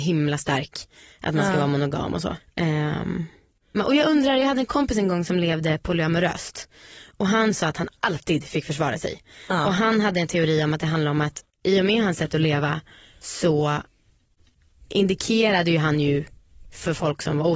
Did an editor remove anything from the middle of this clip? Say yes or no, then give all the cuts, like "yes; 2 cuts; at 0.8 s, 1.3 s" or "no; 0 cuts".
yes; 1 cut; at 2.4 s